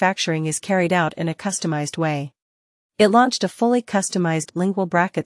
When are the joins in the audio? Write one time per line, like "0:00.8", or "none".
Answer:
0:02.8